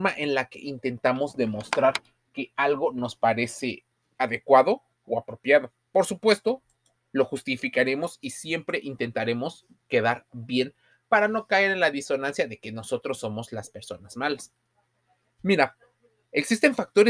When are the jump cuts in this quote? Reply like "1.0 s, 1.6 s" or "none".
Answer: none